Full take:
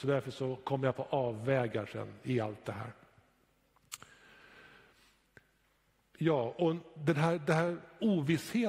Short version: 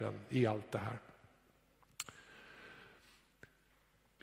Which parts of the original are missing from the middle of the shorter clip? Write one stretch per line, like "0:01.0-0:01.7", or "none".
none